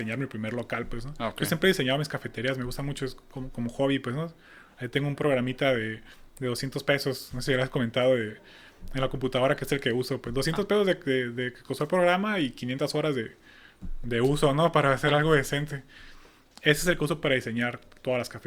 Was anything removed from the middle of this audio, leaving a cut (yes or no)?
no